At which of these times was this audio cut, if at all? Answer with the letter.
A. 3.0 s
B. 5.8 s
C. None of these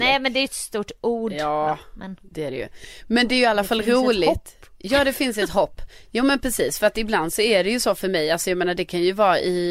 C